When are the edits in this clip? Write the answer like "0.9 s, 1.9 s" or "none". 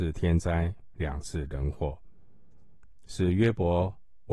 none